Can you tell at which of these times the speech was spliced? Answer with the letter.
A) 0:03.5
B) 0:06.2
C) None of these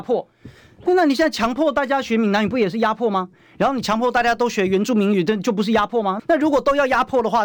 B